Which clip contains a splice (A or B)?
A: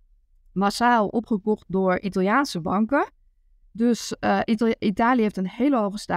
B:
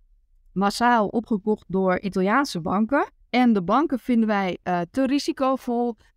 B